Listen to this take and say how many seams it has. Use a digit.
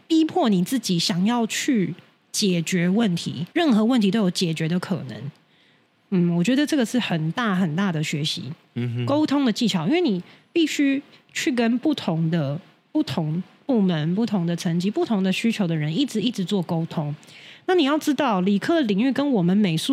1